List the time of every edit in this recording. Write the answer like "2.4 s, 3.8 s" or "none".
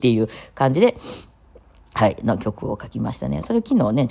none

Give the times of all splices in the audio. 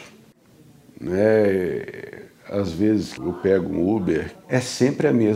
3.2 s, 4.4 s

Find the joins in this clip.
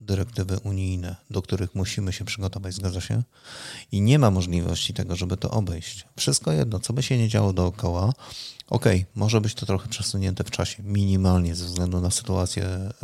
none

